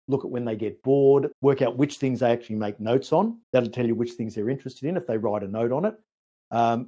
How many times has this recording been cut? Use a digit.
2